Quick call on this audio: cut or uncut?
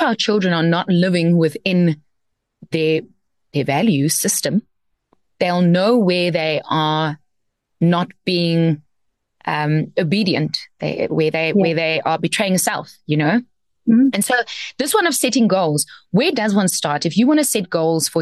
uncut